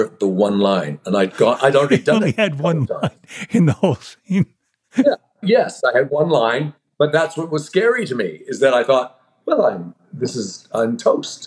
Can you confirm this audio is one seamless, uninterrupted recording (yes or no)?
yes